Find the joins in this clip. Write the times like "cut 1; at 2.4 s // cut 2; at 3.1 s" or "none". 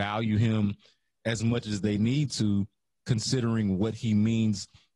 none